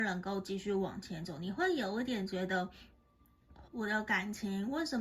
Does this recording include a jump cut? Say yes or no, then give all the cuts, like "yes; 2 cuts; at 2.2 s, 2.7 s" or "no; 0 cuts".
yes; 1 cut; at 3.7 s